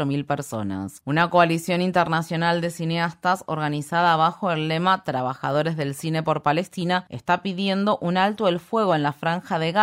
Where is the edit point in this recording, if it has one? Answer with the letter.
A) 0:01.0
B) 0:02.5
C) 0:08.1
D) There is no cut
A